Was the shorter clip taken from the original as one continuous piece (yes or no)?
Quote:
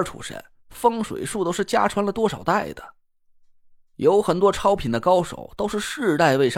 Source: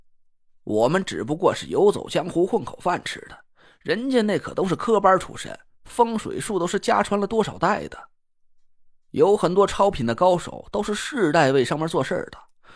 yes